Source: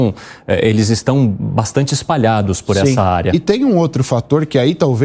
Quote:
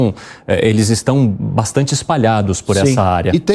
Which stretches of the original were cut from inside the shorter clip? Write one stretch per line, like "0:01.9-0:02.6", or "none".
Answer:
none